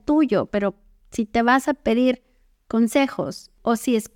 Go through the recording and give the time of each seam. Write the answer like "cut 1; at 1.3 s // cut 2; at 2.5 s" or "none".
none